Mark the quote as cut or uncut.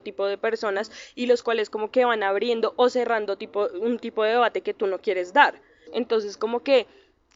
cut